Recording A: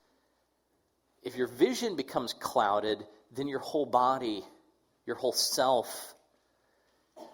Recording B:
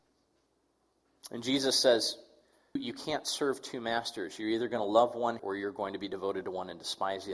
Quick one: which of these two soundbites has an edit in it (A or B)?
B